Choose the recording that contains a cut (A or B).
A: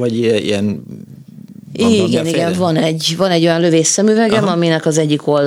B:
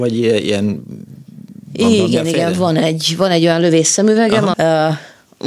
B